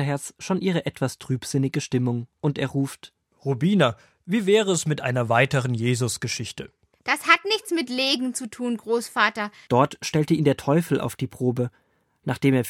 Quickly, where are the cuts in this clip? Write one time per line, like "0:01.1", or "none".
0:06.9
0:09.7